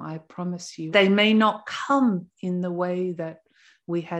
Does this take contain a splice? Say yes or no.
yes